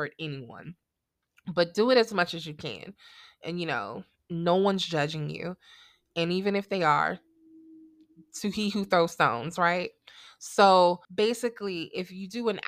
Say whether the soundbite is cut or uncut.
cut